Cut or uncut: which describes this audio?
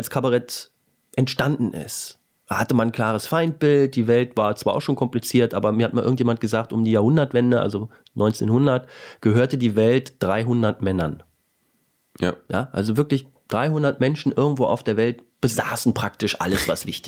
uncut